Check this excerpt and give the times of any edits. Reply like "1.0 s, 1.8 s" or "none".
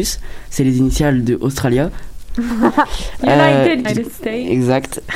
2.3 s, 3.8 s